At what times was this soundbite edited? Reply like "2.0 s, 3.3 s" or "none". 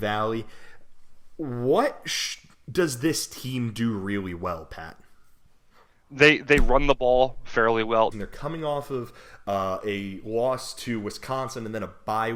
8.1 s